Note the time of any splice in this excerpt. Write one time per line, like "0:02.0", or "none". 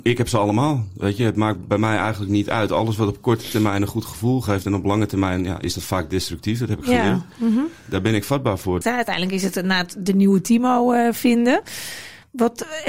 0:08.8